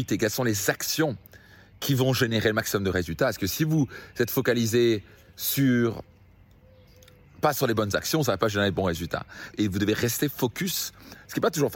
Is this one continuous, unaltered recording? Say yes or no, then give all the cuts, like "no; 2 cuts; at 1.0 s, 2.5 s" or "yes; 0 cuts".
no; 1 cut; at 9.5 s